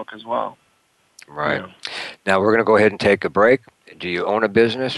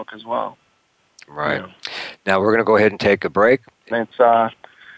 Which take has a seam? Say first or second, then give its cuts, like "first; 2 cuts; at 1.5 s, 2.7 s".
second; 1 cut; at 3.9 s